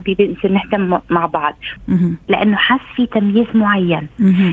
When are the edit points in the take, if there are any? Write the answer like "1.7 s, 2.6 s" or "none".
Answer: 1.8 s